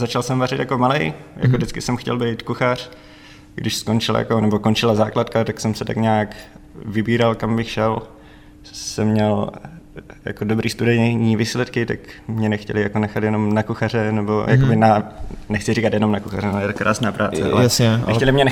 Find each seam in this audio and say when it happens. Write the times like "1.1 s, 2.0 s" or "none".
none